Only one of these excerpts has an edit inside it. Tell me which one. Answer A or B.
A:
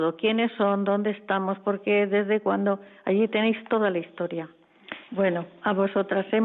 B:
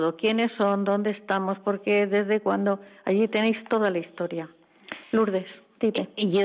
A